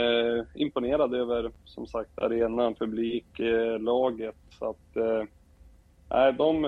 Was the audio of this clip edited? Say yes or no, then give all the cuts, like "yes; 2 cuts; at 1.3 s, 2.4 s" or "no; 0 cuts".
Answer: no; 0 cuts